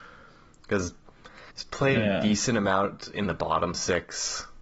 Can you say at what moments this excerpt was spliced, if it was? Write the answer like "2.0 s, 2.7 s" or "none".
1.5 s